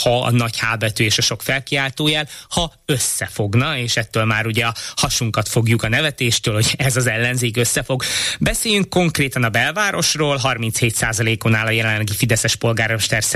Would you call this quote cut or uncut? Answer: uncut